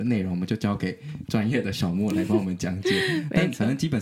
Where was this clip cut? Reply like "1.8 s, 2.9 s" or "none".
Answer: none